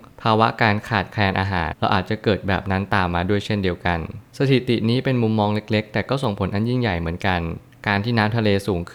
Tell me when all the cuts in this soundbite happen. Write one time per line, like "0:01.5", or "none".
0:01.7